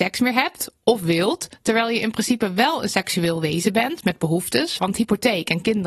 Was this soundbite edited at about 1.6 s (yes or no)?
no